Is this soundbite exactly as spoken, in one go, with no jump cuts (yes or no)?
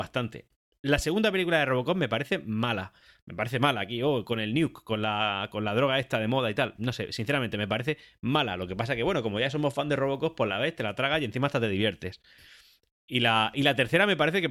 yes